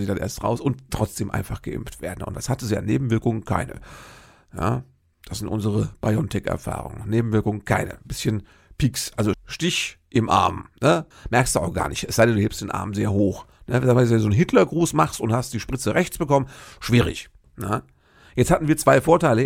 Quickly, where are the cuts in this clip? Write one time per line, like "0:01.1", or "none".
0:09.3
0:11.1